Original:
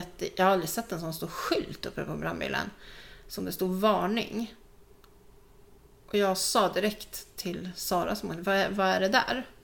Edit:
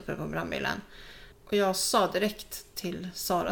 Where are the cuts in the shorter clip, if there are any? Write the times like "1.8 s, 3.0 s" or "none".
1.3 s